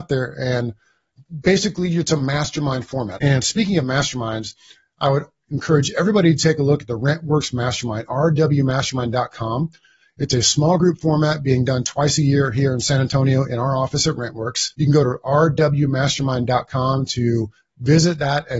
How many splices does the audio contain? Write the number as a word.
two